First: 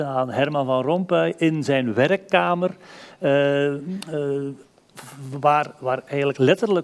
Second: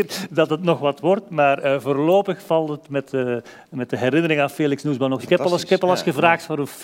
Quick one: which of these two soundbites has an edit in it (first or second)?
second